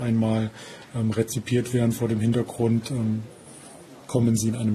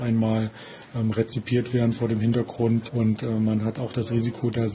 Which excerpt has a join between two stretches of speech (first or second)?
second